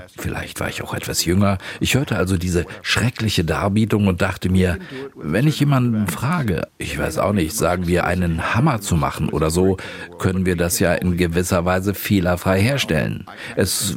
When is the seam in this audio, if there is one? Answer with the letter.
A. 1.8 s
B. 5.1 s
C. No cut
C